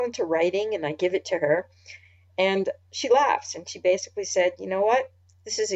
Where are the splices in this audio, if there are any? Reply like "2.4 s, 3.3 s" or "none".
none